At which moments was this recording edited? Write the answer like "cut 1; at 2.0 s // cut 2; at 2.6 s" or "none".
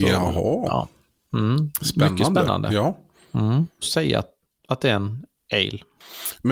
cut 1; at 3.8 s